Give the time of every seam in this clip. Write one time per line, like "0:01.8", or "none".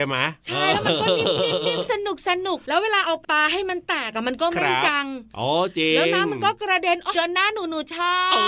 0:03.2
0:07.1

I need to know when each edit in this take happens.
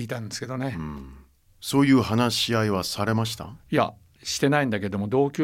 0:01.5

